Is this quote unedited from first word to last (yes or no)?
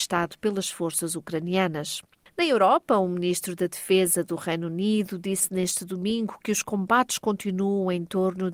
no